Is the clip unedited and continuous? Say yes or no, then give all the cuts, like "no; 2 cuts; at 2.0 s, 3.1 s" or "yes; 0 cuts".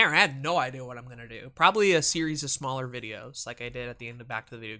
yes; 0 cuts